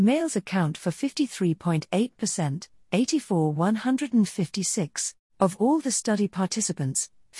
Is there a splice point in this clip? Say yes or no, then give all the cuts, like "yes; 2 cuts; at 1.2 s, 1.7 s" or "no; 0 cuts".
yes; 1 cut; at 5.2 s